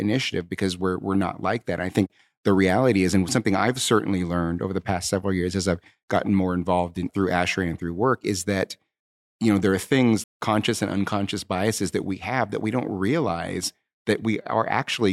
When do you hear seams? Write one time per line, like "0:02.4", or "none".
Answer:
0:07.1
0:10.2